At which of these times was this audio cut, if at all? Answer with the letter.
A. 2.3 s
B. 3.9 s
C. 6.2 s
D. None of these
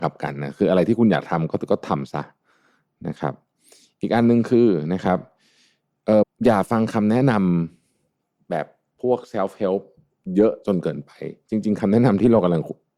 C